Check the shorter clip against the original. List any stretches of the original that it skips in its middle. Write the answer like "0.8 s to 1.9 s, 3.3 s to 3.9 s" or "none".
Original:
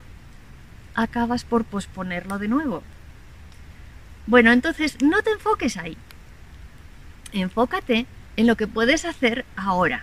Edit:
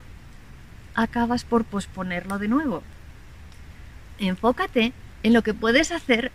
4.2 s to 7.3 s